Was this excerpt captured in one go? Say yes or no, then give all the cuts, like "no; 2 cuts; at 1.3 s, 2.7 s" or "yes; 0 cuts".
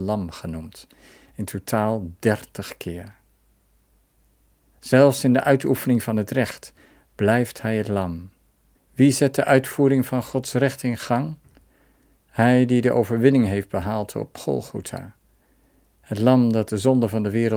no; 1 cut; at 8.8 s